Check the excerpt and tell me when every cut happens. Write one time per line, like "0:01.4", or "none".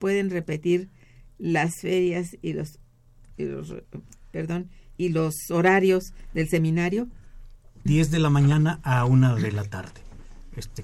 0:05.0
0:07.9